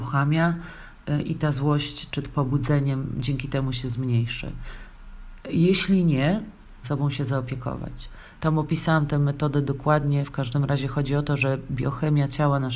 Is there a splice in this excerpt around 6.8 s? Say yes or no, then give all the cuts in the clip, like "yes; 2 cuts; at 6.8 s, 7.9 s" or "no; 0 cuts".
yes; 3 cuts; at 5.4 s, 6.8 s, 8.4 s